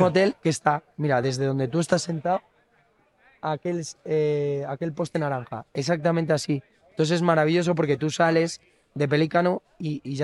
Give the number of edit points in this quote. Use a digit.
0